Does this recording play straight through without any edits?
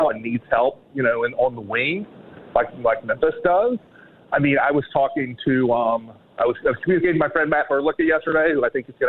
yes; 0 cuts

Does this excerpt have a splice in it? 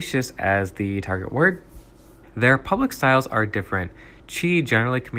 yes; 1 cut; at 2.2 s

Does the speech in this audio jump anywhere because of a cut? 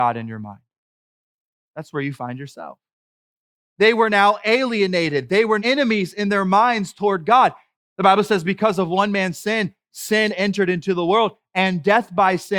yes; 3 cuts; at 3.6 s, 5.6 s, 7.7 s

